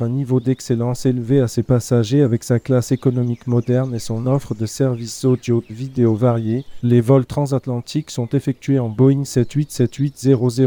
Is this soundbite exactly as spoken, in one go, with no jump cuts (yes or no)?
no